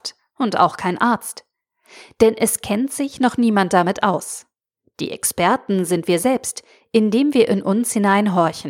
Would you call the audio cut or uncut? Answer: uncut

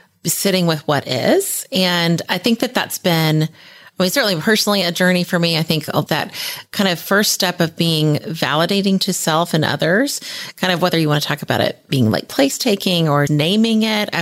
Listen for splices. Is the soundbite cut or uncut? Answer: cut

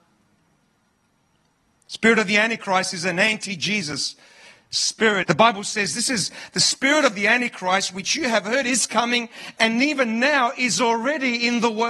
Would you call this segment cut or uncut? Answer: cut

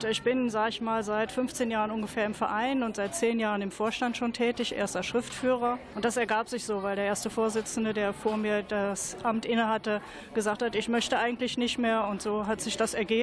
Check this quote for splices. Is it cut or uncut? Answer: uncut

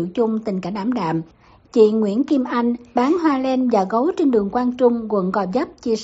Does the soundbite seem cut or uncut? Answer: uncut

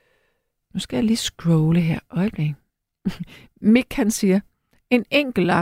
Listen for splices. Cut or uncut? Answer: uncut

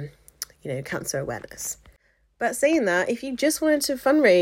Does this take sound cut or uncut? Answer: uncut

